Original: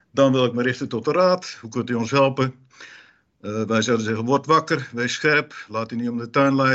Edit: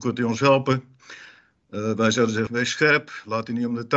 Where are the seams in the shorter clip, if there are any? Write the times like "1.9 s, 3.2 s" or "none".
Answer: 2.5 s